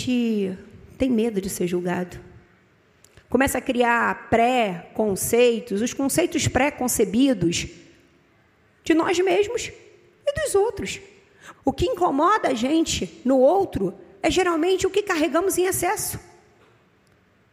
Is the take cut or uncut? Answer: cut